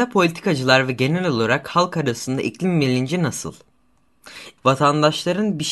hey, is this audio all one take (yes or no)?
no